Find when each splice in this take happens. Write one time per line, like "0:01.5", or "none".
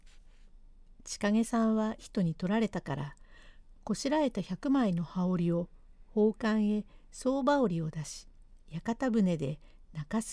0:02.0
0:08.6